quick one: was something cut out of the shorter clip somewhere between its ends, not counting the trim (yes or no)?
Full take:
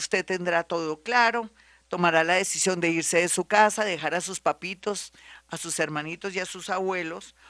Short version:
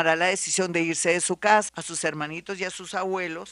yes